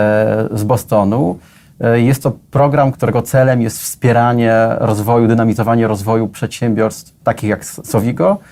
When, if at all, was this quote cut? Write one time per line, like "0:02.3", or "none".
0:02.9
0:07.2